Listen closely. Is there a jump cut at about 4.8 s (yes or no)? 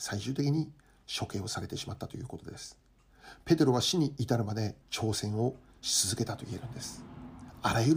yes